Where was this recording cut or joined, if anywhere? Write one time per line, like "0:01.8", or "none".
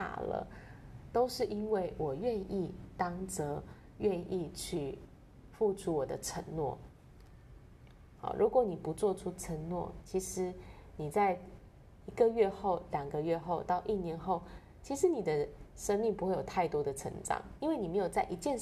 0:08.2